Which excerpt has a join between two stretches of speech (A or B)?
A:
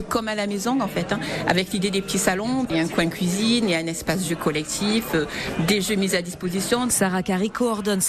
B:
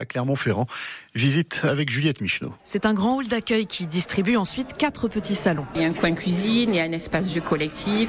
B